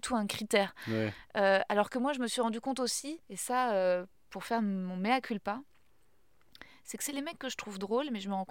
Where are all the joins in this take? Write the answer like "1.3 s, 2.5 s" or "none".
3.2 s